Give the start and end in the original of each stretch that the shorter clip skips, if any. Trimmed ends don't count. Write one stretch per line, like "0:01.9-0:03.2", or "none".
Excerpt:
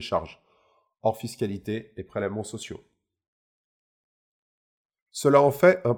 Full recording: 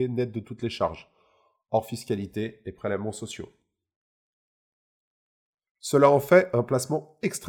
none